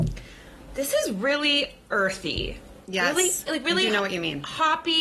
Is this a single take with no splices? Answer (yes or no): no